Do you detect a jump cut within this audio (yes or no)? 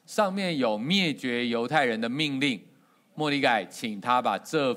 no